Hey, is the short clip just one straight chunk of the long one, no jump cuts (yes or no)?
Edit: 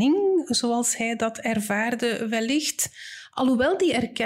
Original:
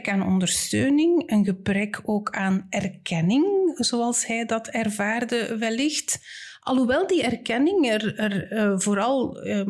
yes